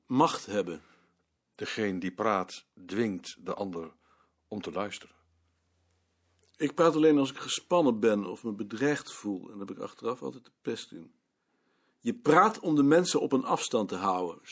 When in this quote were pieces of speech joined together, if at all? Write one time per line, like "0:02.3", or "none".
0:01.4